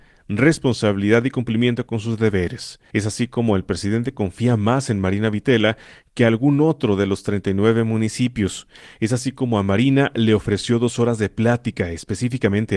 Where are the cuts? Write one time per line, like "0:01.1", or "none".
0:02.9